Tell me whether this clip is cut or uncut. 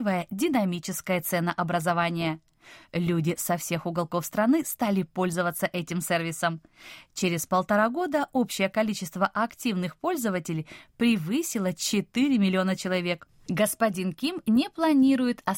uncut